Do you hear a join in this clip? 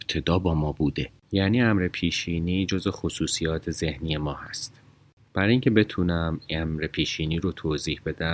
no; 0 cuts

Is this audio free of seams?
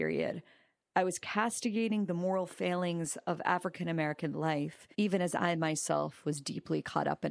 no; 1 cut; at 4.9 s

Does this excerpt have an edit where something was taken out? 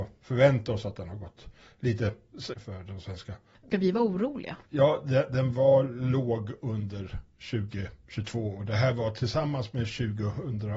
yes; 2 cuts; at 2.5 s, 4.6 s

